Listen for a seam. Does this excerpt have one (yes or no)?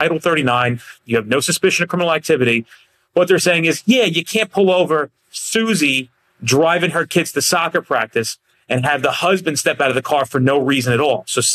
yes